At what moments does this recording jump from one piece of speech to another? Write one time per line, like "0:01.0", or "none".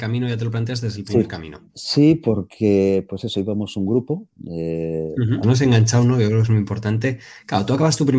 0:01.7
0:05.4